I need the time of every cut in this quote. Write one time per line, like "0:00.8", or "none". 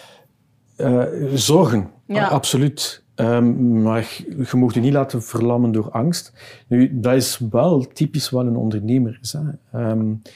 none